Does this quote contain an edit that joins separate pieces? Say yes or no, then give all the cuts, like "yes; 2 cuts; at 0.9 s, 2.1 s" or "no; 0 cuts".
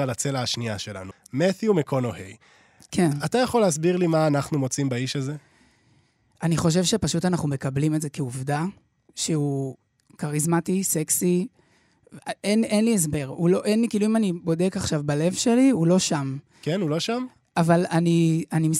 no; 0 cuts